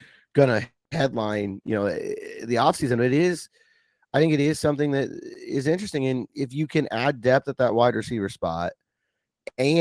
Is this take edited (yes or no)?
no